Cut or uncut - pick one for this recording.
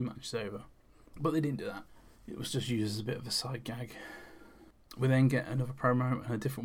uncut